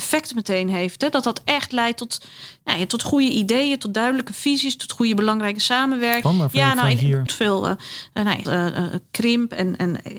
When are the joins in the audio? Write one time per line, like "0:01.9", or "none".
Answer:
0:06.2
0:07.3
0:08.4